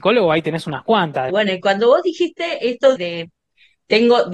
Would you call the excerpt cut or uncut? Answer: cut